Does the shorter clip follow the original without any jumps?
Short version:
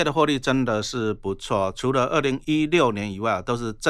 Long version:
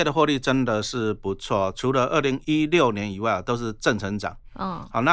yes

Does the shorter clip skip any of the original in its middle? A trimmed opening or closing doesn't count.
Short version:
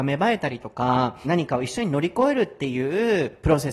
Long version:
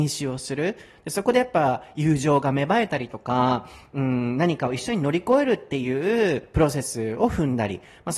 yes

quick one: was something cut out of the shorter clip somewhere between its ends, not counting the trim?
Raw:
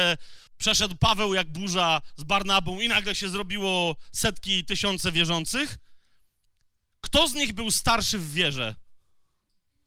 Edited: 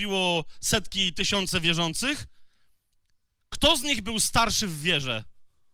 no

